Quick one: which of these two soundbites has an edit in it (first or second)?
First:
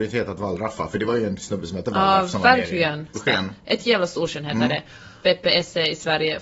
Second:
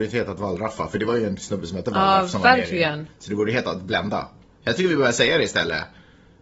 first